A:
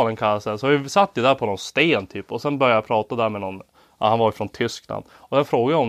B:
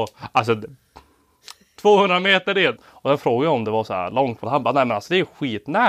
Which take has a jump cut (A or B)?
B